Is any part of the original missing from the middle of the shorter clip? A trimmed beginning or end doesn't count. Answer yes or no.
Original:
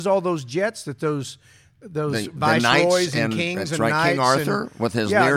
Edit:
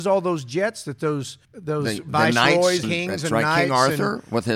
yes